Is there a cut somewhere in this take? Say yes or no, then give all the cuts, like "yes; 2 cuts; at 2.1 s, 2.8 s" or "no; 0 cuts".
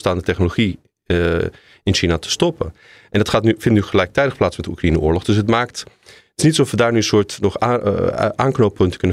no; 0 cuts